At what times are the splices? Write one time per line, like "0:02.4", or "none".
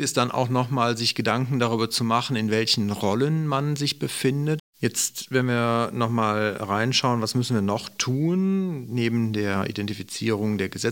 0:04.6